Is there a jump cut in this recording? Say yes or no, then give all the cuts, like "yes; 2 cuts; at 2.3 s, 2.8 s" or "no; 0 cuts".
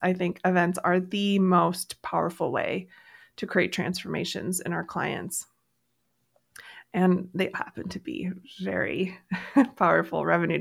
yes; 1 cut; at 7.5 s